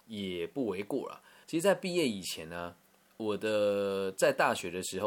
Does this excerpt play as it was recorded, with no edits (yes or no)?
no